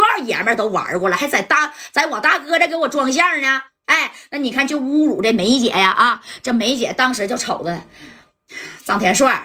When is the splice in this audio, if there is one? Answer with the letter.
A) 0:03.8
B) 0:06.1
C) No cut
C